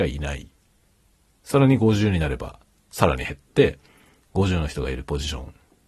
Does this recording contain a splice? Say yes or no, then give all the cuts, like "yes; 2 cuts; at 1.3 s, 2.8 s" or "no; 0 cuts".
no; 0 cuts